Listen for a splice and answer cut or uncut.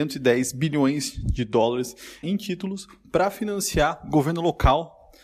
cut